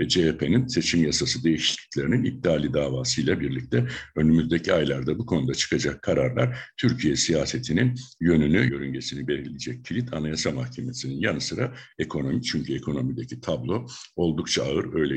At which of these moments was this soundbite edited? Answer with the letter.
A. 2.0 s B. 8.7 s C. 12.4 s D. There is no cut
B